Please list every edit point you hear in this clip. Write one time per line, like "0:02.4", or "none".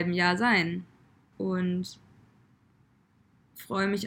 0:01.3